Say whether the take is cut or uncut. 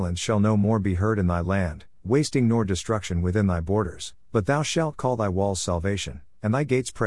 uncut